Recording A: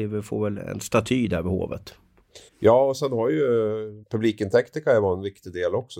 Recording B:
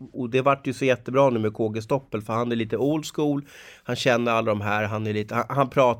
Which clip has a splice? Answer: A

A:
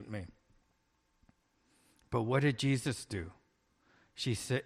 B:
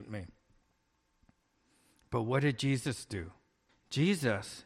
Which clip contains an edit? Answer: B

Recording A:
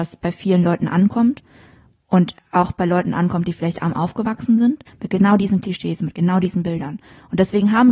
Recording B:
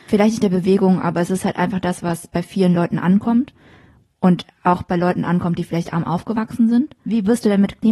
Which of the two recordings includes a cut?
A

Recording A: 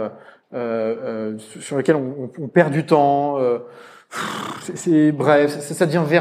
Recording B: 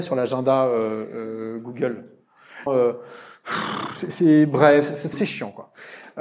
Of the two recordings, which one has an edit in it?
B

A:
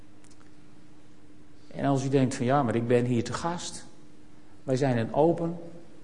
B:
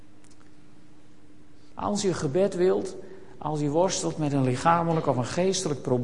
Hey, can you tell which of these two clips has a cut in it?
B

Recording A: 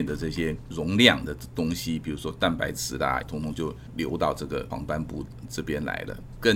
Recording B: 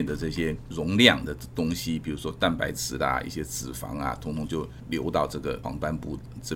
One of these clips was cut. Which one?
A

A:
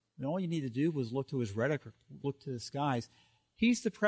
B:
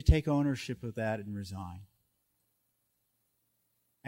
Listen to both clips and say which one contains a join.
A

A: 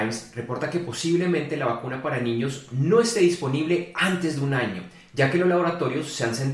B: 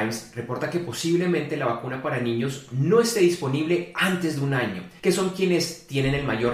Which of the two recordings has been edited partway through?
B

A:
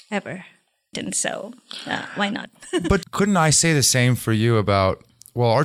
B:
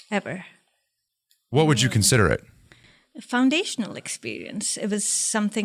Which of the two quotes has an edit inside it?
A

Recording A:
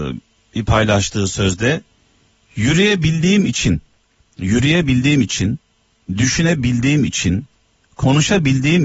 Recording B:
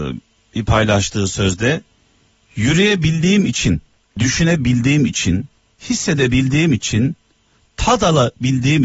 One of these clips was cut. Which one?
B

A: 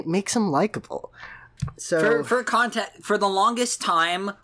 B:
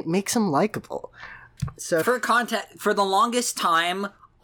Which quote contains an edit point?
B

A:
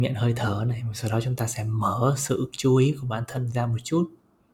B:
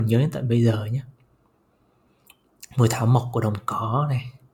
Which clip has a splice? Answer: A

